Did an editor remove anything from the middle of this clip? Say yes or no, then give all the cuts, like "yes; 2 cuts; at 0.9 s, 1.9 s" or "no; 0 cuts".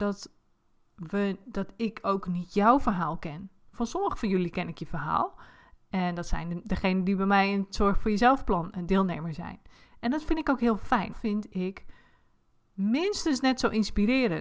yes; 1 cut; at 11.1 s